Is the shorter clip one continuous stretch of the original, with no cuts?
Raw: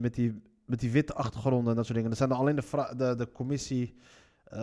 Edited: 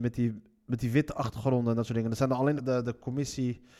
no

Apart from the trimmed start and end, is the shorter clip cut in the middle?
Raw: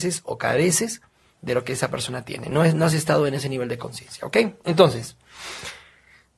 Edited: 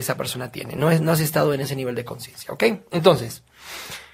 no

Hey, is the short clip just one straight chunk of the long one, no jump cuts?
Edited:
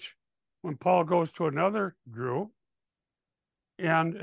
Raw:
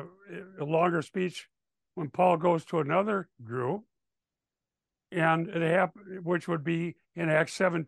yes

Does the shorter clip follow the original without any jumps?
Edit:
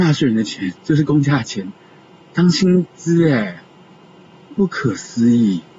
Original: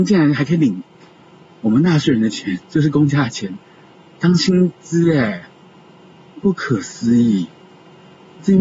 yes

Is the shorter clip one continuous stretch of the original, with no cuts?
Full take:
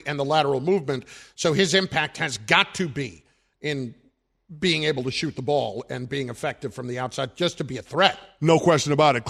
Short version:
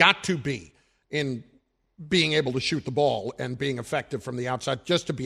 yes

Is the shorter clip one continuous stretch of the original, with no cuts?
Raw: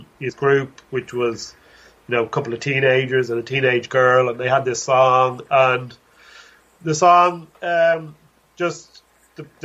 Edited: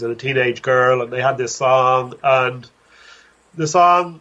yes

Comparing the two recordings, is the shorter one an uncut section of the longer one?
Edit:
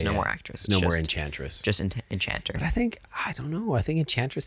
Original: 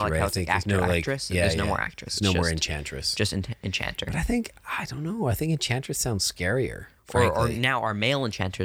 yes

